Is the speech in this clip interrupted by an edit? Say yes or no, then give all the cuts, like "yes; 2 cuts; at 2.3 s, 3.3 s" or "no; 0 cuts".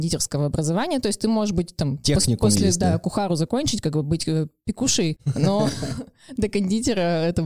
no; 0 cuts